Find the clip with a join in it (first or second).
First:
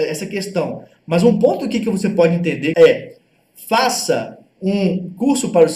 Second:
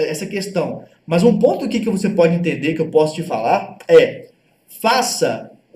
first